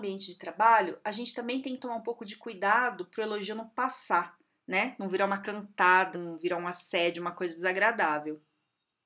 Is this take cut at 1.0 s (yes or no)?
no